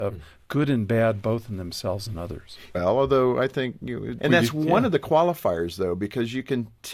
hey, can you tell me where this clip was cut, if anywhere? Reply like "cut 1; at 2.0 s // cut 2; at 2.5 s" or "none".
cut 1; at 2.7 s // cut 2; at 4.2 s